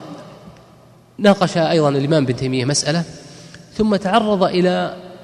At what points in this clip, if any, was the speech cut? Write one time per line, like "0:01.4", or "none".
none